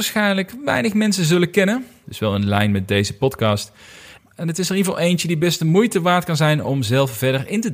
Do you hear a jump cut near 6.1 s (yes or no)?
no